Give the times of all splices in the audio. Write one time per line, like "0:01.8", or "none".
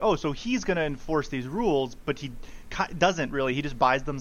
none